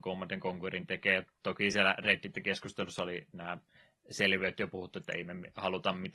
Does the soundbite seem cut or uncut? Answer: uncut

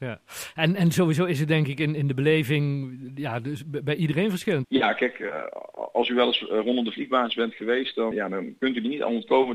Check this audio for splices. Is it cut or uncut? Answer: cut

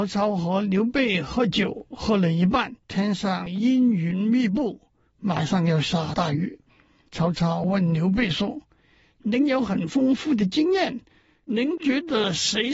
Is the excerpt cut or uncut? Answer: cut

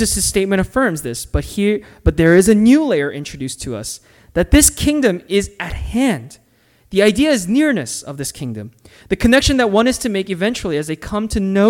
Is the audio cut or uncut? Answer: uncut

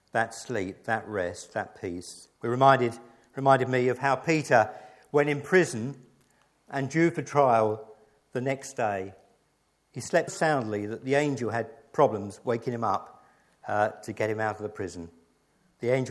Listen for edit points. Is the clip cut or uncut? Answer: cut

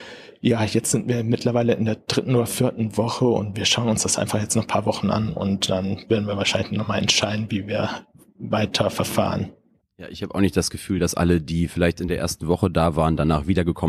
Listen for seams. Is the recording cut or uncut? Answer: uncut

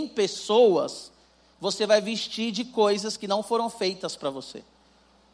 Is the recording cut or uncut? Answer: cut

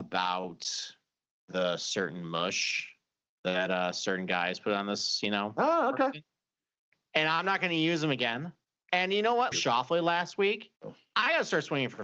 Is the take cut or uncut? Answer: cut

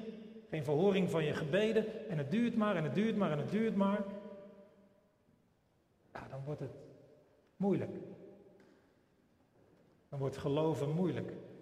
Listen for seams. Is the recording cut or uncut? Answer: uncut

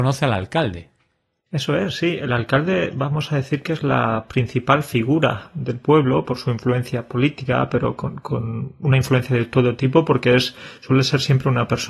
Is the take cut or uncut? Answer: uncut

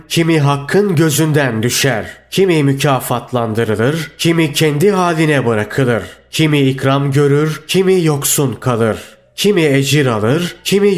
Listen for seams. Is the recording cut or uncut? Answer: uncut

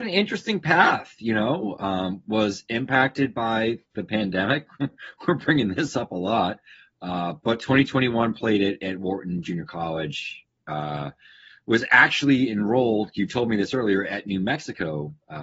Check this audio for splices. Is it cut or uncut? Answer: uncut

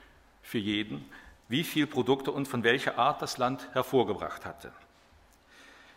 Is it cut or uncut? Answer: uncut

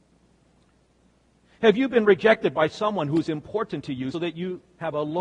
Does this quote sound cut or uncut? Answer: cut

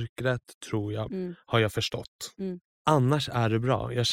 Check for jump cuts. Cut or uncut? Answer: cut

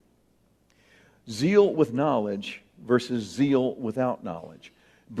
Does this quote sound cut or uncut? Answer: uncut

